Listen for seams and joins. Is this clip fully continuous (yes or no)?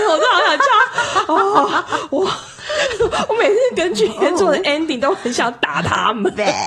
yes